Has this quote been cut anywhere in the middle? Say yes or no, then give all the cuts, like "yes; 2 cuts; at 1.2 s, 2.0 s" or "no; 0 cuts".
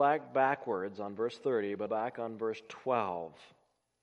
yes; 1 cut; at 1.9 s